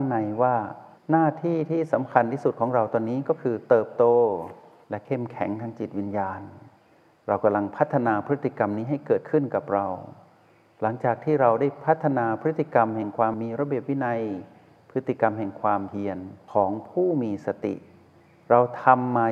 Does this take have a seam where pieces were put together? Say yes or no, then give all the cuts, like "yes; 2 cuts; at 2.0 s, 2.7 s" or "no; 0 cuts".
yes; 1 cut; at 13.3 s